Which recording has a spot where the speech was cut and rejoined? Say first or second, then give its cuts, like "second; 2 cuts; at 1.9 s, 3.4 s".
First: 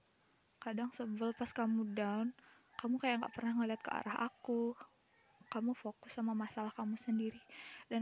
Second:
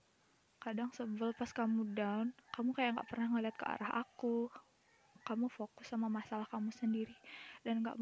second; 1 cut; at 2.4 s